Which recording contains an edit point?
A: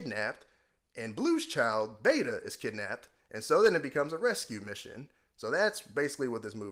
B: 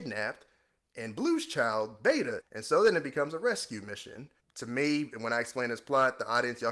B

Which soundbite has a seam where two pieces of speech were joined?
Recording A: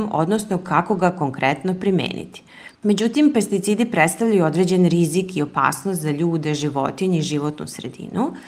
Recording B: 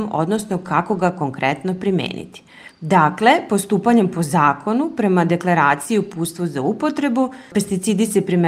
A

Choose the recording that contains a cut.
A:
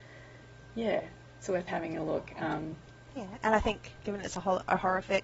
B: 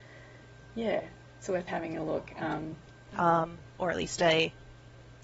B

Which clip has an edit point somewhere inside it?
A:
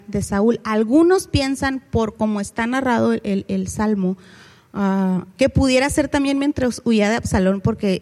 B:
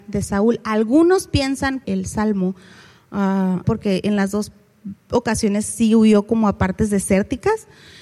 B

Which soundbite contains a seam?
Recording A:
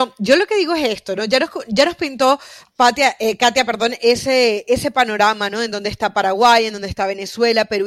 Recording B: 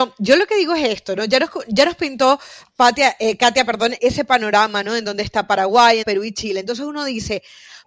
B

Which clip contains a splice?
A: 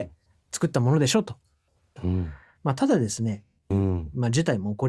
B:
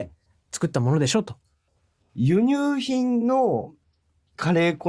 A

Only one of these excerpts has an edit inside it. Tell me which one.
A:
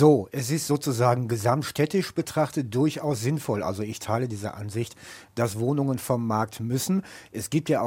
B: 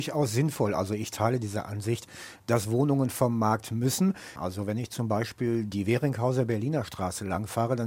B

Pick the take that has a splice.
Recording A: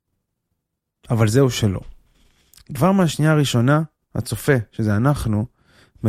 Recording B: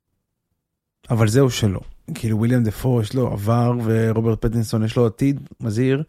B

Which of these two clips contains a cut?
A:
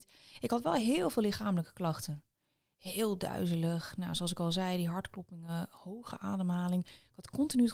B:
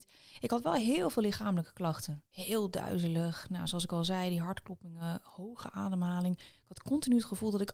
B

